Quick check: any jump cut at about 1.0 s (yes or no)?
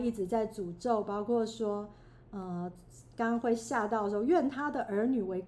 no